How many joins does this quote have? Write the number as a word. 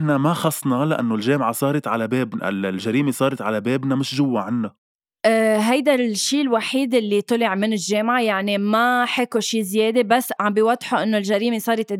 one